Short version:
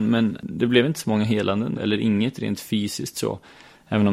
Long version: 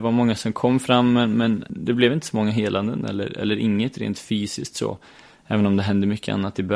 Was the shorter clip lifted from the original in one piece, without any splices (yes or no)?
no